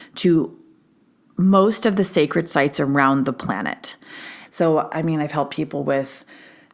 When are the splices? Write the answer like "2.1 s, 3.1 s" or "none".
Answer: 4.5 s